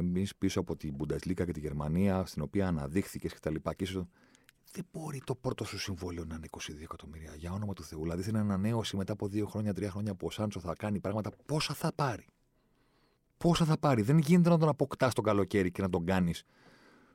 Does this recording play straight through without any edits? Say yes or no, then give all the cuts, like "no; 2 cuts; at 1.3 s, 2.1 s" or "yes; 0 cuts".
yes; 0 cuts